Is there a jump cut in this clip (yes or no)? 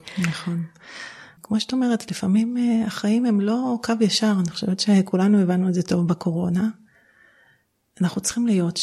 no